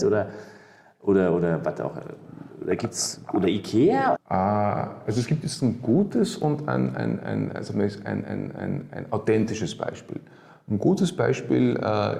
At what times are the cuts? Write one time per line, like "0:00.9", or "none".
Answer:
0:04.1